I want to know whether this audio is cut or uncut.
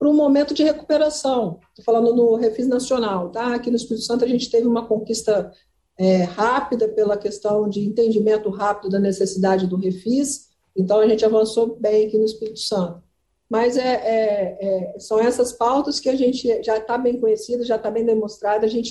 uncut